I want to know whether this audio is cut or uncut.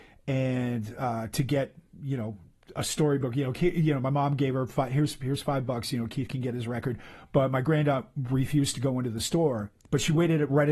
uncut